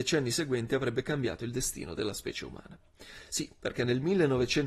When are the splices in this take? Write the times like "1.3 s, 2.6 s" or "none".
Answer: none